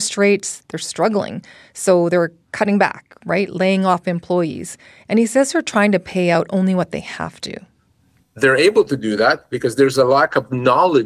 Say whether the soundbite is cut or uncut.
uncut